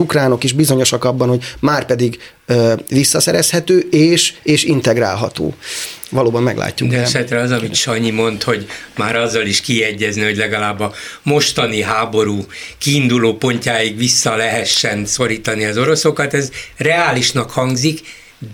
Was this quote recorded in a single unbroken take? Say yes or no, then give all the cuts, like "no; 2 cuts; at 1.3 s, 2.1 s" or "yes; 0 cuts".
yes; 0 cuts